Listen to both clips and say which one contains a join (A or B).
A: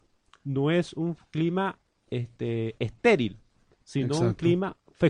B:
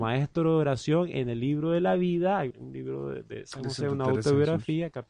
B